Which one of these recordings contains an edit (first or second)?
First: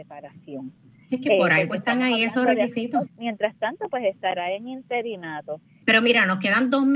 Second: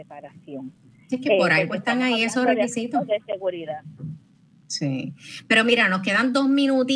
first